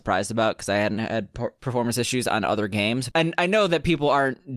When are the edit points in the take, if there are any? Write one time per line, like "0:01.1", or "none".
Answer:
0:03.1